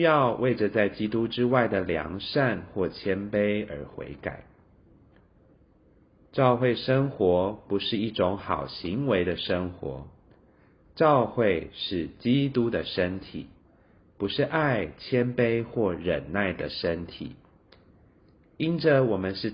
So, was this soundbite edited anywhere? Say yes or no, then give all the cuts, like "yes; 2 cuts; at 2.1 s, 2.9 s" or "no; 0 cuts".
no; 0 cuts